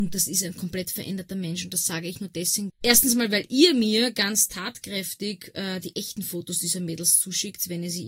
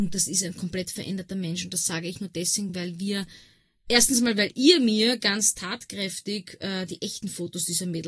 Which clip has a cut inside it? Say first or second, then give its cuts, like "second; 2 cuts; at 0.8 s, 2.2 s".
first; 1 cut; at 2.7 s